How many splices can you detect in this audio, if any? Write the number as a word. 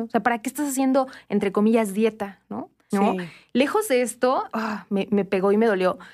two